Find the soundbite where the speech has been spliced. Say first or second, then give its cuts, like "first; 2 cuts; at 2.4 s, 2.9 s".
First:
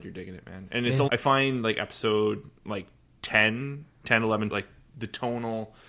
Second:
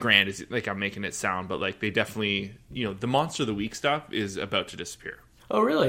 first; 2 cuts; at 1.1 s, 4.5 s